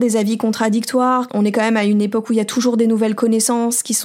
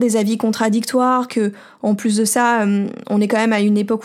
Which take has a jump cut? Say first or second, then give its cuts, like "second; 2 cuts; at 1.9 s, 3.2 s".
first; 1 cut; at 1.3 s